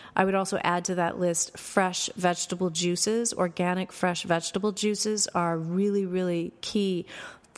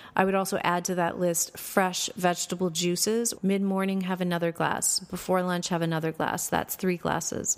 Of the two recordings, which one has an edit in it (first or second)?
second